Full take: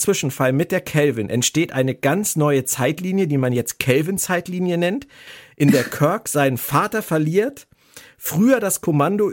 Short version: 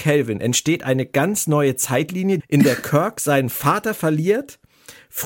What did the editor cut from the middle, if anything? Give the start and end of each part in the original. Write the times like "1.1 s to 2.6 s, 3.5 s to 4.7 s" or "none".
3.3 s to 5.5 s